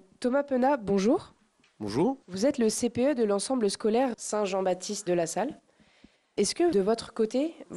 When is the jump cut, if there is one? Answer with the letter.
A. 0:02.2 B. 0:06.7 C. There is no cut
A